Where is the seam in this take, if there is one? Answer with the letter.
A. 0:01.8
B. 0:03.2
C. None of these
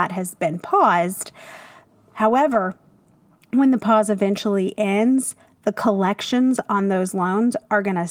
C